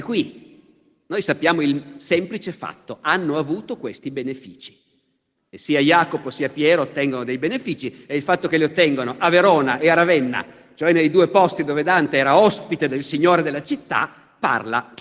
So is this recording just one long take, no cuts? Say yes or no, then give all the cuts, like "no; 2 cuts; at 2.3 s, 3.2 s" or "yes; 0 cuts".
no; 1 cut; at 5.4 s